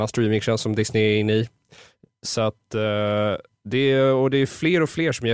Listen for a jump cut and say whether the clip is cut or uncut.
uncut